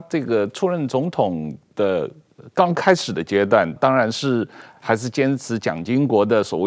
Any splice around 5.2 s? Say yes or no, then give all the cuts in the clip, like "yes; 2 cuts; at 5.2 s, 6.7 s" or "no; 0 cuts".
no; 1 cut; at 3.8 s